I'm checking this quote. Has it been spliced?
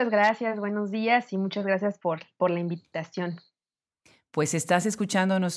no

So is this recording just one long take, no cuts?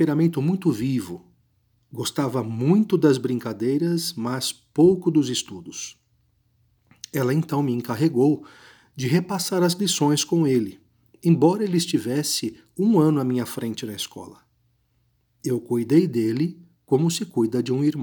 yes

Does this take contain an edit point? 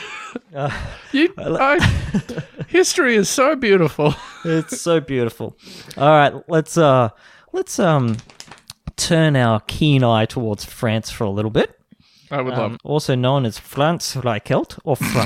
yes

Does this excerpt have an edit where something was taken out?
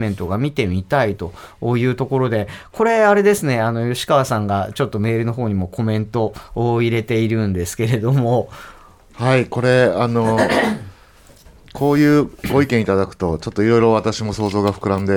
no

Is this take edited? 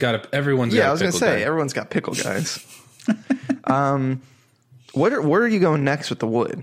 no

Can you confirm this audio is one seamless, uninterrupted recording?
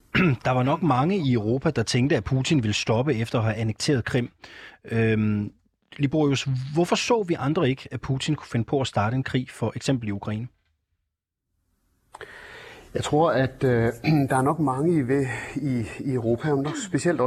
yes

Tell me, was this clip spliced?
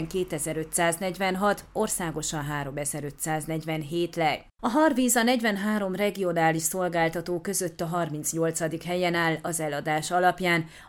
no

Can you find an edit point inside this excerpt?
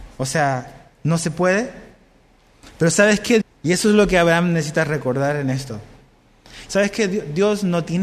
yes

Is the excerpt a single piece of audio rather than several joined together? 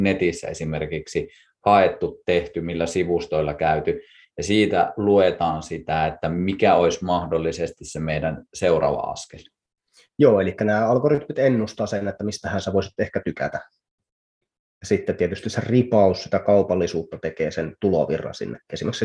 yes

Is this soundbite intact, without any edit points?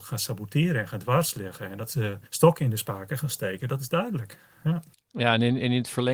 no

